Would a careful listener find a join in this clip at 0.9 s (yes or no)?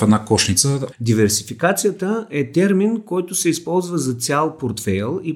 yes